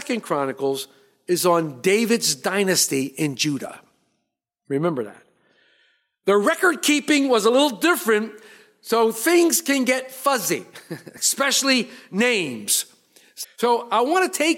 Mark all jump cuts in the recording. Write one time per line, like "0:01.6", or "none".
0:13.4